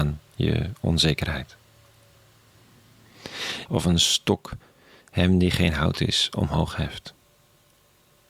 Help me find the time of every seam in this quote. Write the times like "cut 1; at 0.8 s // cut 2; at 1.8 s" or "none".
cut 1; at 3.7 s